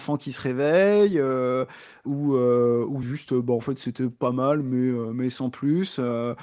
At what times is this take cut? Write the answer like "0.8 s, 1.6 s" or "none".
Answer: none